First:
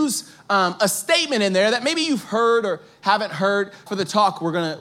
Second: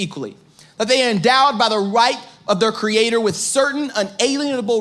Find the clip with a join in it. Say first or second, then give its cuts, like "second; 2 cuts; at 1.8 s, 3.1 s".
first; 1 cut; at 3.9 s